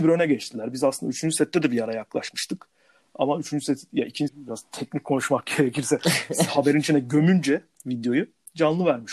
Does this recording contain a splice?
yes; 1 cut; at 4.3 s

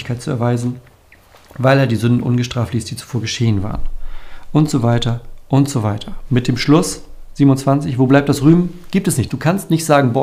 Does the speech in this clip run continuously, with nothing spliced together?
no; 1 cut; at 9.3 s

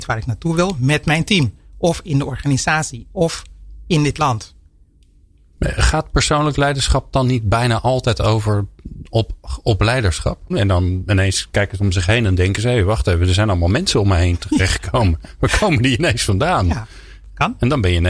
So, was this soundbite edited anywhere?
yes; 1 cut; at 10.5 s

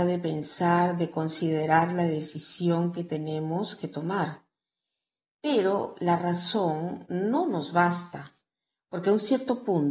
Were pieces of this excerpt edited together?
no; 0 cuts

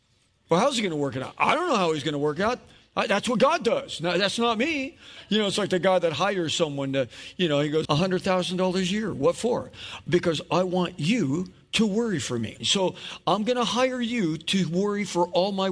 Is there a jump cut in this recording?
yes; 2 cuts; at 7.8 s, 12.6 s

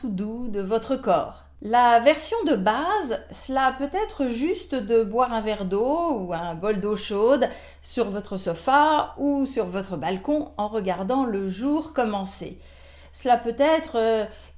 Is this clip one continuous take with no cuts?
no; 1 cut; at 1.6 s

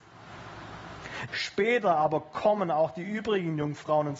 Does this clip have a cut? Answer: yes; 1 cut; at 1.3 s

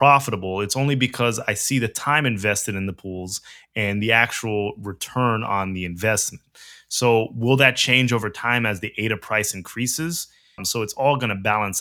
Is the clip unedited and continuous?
no; 1 cut; at 10.6 s

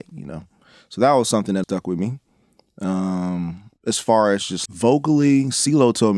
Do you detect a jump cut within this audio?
yes; 2 cuts; at 1.6 s, 4.7 s

